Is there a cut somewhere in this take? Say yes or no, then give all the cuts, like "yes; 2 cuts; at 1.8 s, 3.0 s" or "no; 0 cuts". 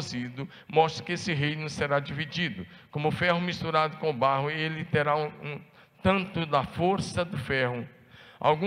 no; 0 cuts